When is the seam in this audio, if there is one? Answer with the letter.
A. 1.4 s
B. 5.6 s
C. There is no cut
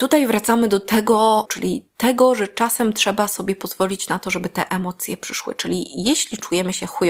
A